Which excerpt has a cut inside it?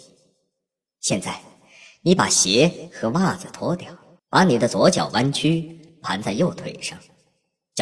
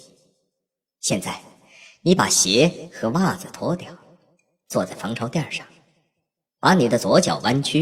first; 1 cut; at 4.2 s

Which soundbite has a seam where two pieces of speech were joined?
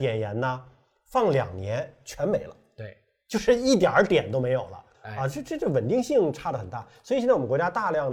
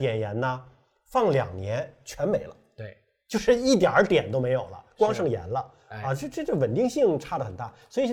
first; 1 cut; at 4.9 s

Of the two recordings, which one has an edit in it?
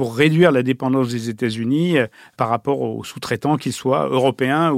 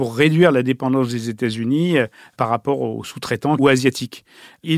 second; 1 cut; at 3.6 s

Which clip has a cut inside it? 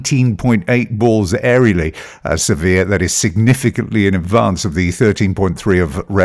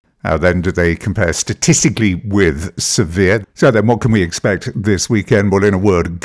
second; 1 cut; at 3.4 s

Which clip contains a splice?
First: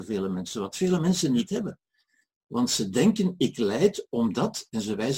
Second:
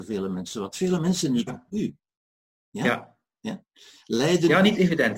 second; 1 cut; at 1.5 s

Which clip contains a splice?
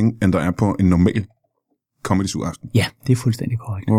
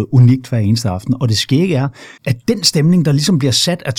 second; 1 cut; at 2.2 s

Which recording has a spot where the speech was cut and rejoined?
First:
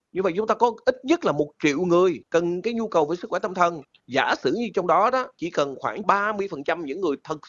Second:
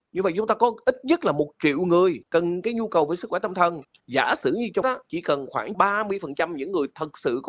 second; 1 cut; at 4.8 s

